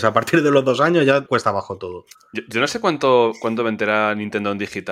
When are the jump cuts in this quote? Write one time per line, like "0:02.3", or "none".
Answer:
0:01.3